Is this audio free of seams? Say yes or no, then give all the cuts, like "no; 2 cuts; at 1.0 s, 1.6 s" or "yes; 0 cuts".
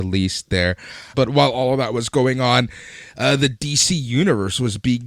no; 1 cut; at 1.1 s